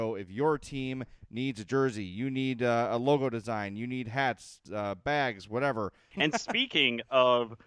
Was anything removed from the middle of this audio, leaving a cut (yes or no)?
yes